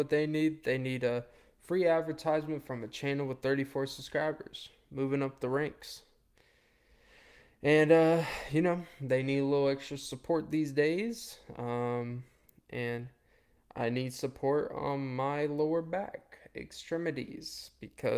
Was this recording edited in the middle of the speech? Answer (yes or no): no